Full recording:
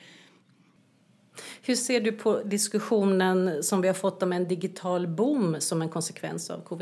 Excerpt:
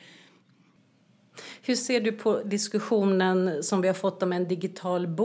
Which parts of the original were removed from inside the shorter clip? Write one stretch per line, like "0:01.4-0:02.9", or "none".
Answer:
none